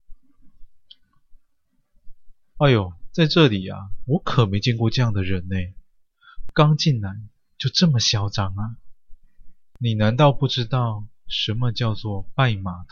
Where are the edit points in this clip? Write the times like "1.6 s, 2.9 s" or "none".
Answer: 2.6 s